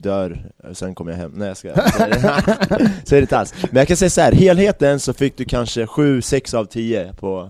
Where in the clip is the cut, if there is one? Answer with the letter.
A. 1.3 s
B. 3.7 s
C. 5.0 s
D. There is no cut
D